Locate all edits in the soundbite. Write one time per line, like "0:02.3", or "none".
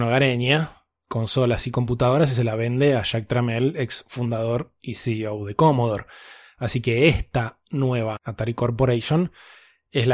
0:08.2